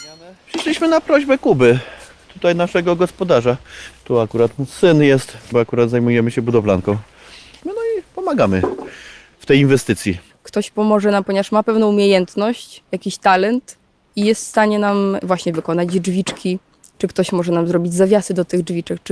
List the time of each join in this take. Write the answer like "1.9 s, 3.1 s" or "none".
3.9 s, 5.5 s, 10.3 s